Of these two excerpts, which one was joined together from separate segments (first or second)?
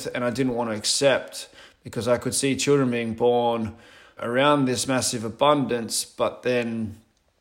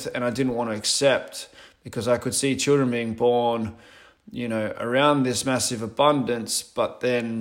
first